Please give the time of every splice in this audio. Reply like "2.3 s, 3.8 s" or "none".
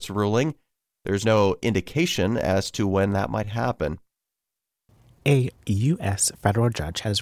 none